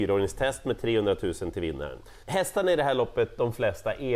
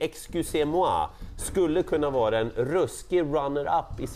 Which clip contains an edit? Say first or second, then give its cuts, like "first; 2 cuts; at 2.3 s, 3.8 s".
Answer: first; 1 cut; at 2.2 s